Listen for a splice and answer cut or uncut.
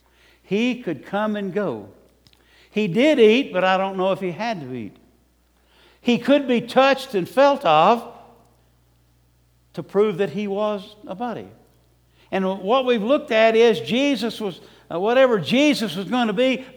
uncut